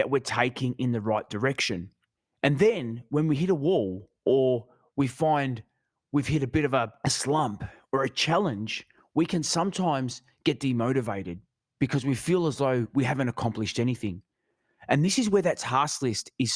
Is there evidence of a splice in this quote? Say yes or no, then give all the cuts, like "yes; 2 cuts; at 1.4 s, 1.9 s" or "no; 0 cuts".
no; 0 cuts